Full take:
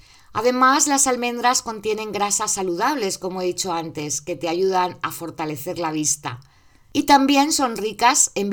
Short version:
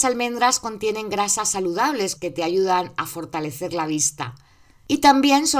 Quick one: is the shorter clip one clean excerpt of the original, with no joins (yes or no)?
no